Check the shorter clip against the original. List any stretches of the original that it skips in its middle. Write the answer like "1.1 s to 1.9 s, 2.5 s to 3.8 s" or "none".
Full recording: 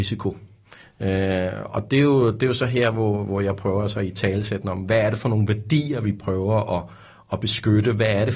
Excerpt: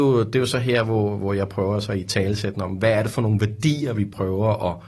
none